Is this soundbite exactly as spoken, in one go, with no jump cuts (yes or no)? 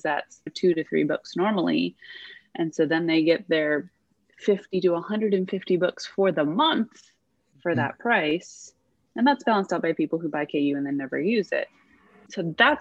yes